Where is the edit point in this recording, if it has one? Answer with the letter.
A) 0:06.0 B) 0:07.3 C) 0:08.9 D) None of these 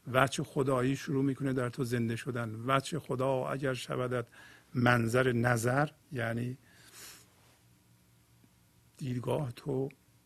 A